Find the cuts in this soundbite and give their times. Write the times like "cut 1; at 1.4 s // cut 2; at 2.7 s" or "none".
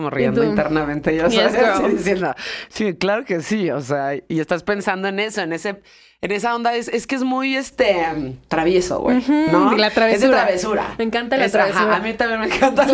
none